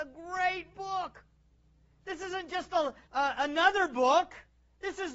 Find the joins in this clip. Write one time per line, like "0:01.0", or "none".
0:03.0